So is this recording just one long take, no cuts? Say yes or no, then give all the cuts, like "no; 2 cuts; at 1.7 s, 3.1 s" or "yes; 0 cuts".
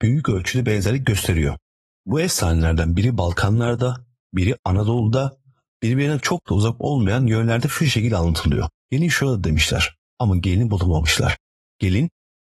no; 1 cut; at 8.8 s